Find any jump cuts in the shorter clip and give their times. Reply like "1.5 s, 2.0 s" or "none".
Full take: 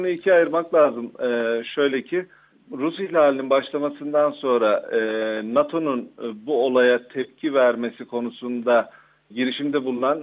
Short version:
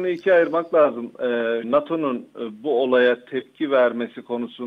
1.6 s